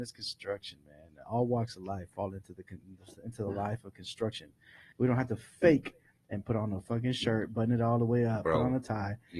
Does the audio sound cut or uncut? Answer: cut